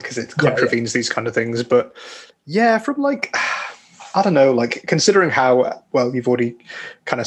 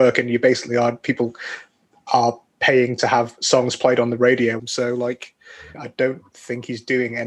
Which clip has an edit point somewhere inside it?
second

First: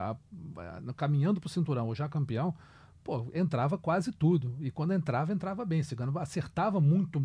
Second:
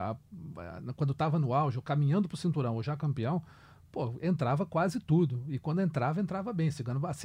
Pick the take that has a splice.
first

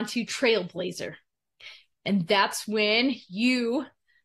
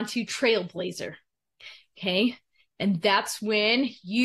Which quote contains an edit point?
first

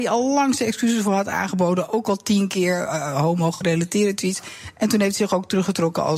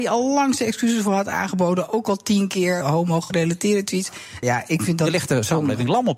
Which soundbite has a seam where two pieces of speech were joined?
second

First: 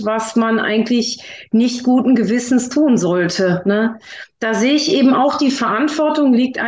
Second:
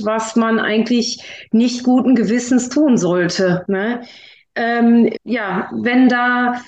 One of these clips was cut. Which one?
second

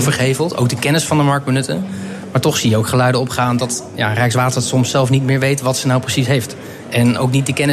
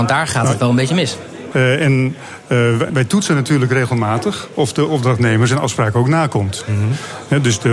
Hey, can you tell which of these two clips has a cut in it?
second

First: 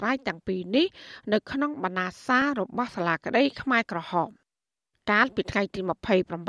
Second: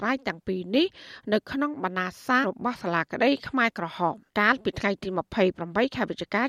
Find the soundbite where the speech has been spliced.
second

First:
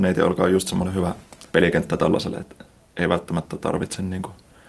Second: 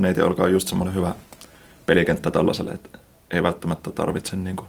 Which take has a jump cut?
first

